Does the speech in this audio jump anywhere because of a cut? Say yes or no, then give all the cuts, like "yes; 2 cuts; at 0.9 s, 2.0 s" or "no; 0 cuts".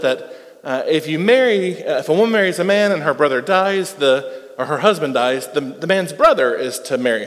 no; 0 cuts